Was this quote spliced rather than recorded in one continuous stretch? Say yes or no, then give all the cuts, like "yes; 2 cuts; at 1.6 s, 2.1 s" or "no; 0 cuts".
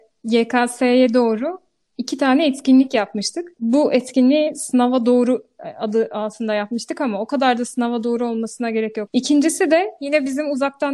yes; 2 cuts; at 3.6 s, 9.1 s